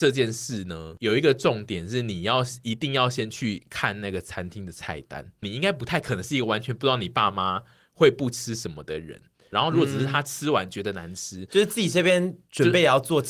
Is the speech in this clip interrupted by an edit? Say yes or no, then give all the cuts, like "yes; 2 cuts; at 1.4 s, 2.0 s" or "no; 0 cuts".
yes; 2 cuts; at 5.4 s, 9.5 s